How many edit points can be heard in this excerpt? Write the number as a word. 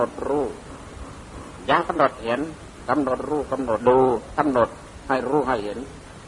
one